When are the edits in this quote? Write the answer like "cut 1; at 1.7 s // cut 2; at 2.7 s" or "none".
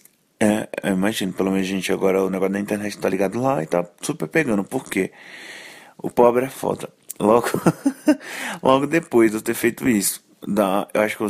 none